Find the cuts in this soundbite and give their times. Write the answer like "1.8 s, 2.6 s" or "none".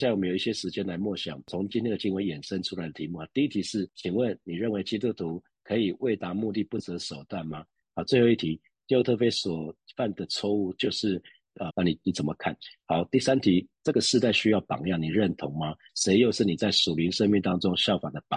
7.8 s, 11.7 s, 15.9 s